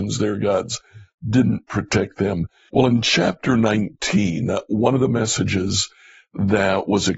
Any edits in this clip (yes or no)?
yes